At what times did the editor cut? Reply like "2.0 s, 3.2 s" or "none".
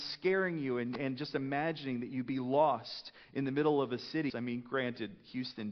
4.3 s